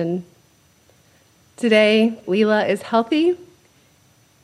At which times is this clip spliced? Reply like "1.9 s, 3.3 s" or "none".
2.2 s

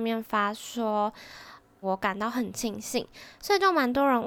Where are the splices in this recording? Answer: 1.8 s

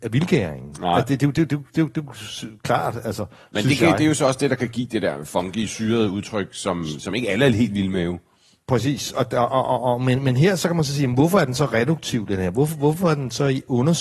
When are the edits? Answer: none

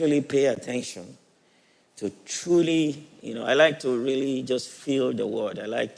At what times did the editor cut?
none

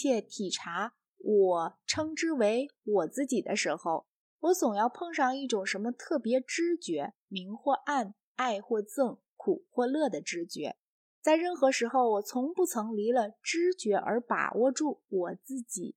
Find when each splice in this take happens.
7.3 s

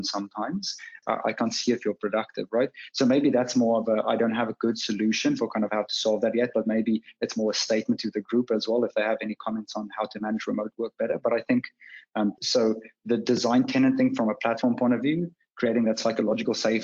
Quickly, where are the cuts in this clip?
1.0 s, 12.4 s

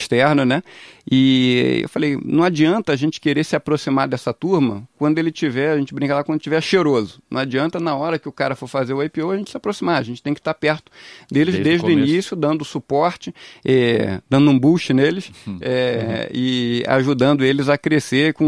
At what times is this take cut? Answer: none

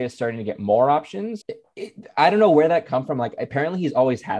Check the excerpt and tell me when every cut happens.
1.4 s

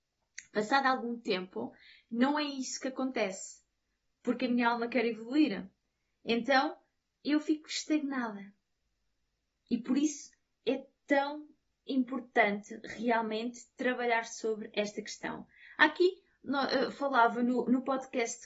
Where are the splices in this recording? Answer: none

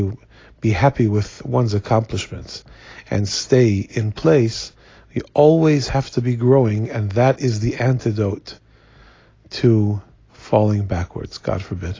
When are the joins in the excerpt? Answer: none

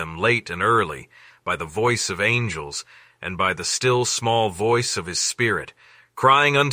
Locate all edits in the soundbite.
1.3 s

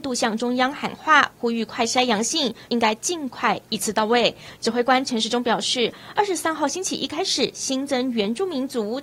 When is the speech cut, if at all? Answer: 2.7 s

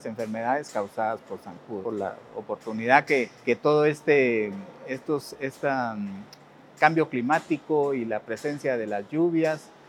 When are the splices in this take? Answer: 1.8 s, 3.3 s

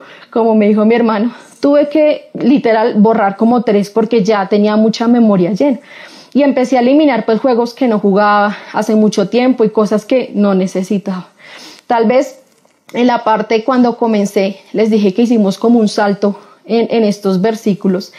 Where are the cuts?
3.9 s

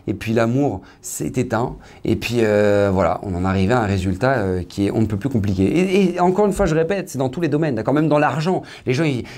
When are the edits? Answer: none

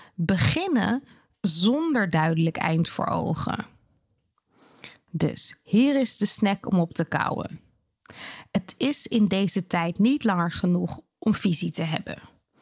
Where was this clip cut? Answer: none

